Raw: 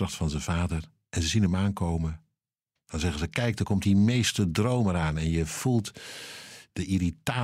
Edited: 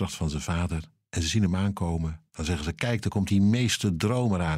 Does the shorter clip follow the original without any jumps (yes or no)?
no